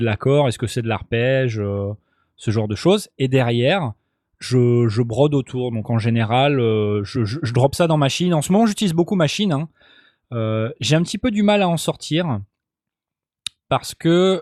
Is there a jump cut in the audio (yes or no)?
no